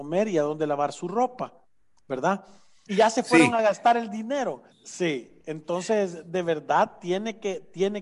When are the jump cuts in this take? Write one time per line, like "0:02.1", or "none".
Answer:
0:02.9
0:04.7